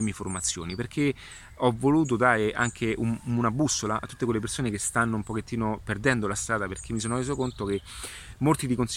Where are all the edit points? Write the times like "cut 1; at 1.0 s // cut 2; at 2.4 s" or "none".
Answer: none